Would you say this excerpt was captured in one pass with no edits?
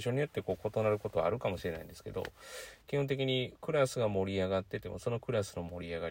no; 1 cut; at 2.8 s

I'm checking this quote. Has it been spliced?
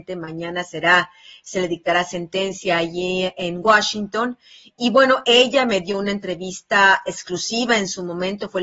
no; 0 cuts

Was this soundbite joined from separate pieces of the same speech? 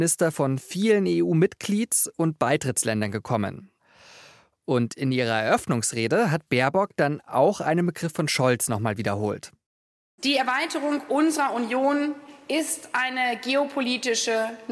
no; 0 cuts

